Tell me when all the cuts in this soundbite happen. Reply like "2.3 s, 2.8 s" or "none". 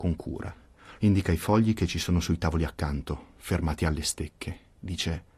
1.0 s